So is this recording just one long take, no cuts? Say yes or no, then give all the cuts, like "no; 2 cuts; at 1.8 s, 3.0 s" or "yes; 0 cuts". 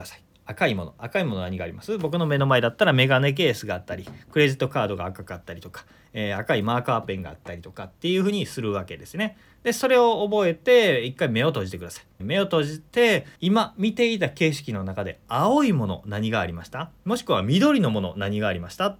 no; 2 cuts; at 12.2 s, 13.4 s